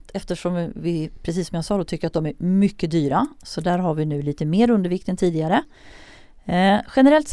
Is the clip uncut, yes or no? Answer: yes